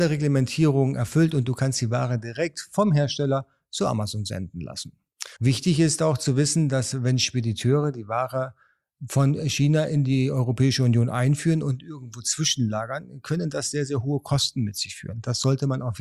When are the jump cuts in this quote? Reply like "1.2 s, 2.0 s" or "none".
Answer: 5.4 s

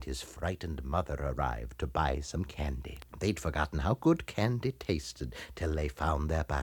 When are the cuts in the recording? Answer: 3.1 s

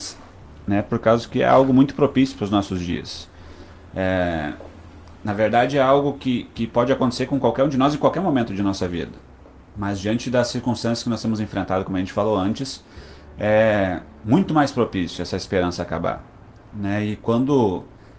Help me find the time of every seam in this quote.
6.2 s

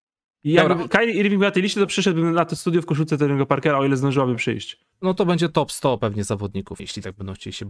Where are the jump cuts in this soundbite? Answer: 4.9 s, 6.8 s

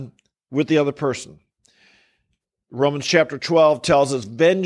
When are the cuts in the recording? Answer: none

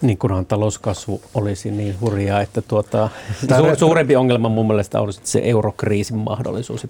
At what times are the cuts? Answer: 3.5 s

